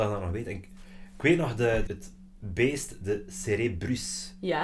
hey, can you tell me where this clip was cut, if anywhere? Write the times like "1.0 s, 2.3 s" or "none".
1.9 s